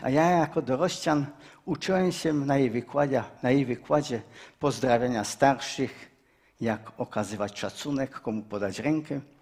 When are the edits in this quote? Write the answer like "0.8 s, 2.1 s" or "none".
3.4 s, 6.6 s

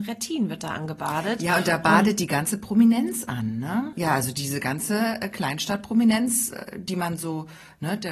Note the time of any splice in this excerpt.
3.9 s

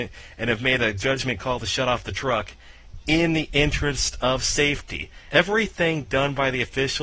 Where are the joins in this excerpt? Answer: 5.3 s

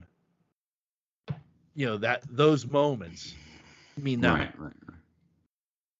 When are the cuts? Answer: 4.4 s

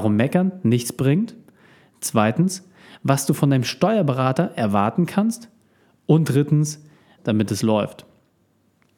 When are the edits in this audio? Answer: 7.2 s

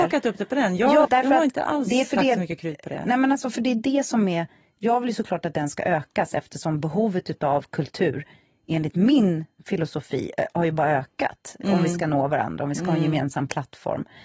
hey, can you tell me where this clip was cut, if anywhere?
1.0 s

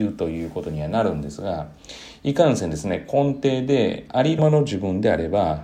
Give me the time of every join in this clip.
4.4 s

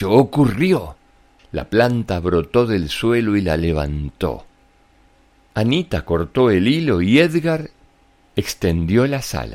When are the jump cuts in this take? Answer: none

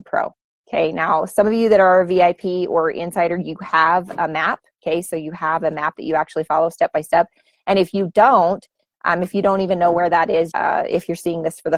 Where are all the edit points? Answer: 10.5 s

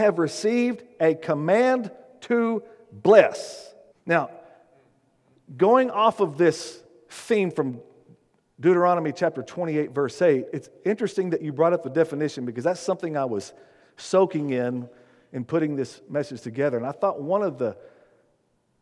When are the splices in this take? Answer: 3.9 s

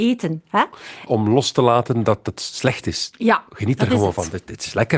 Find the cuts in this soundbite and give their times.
1.1 s

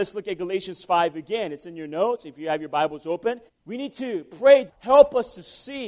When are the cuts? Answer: 3.5 s, 4.7 s

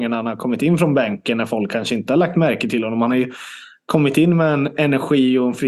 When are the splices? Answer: none

